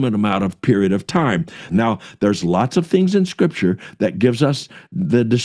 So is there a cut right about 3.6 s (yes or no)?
no